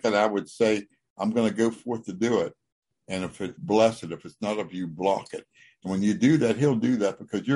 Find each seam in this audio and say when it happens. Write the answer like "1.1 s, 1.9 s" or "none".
3.6 s